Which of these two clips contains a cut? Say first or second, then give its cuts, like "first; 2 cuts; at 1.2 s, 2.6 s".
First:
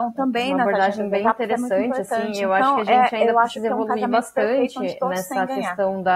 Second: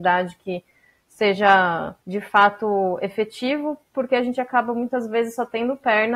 second; 1 cut; at 2.0 s